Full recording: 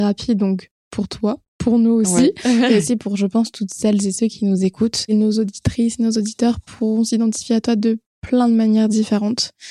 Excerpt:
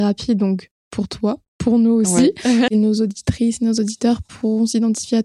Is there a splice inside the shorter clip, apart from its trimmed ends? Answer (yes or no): yes